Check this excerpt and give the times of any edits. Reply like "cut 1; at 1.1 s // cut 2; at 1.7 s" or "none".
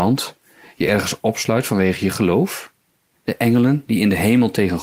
cut 1; at 3.1 s